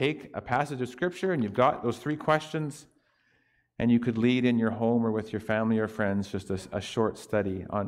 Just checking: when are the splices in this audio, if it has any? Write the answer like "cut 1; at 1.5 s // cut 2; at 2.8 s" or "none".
none